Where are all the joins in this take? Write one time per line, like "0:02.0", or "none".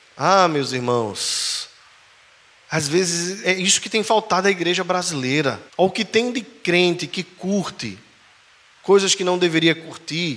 0:03.4
0:05.7